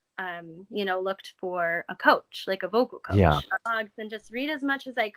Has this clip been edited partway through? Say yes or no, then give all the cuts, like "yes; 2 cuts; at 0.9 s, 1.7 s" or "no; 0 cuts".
yes; 1 cut; at 3.7 s